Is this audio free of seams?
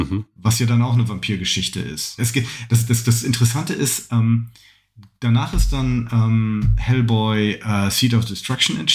no; 1 cut; at 2.2 s

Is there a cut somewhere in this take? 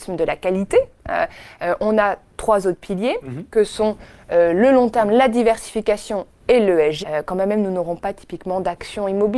yes; 1 cut; at 7.0 s

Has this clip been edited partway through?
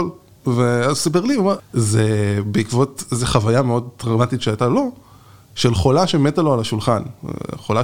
yes; 1 cut; at 1.6 s

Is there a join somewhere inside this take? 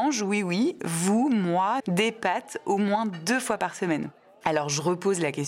yes; 1 cut; at 1.8 s

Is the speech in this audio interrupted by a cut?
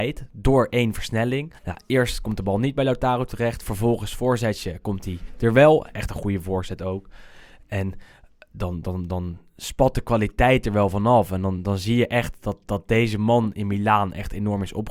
yes; 1 cut; at 1.6 s

